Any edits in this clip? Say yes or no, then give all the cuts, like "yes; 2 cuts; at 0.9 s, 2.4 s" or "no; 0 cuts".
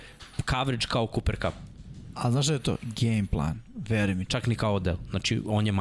yes; 2 cuts; at 2.1 s, 4.3 s